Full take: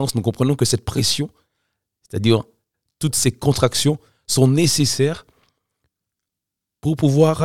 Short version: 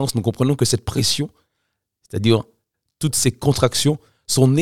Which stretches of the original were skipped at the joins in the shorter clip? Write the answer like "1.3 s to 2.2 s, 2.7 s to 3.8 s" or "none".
none